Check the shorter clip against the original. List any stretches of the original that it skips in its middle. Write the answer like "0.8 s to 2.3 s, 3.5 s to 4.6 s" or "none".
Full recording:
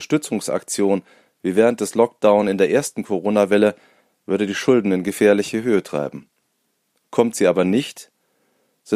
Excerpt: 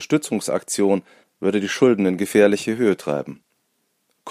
1.2 s to 4.1 s